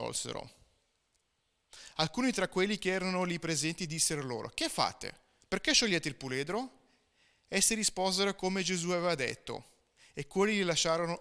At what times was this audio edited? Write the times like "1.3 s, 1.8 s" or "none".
none